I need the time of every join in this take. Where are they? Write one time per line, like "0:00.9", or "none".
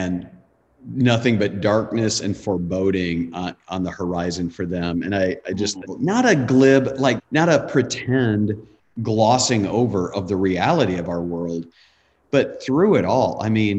0:05.8
0:07.2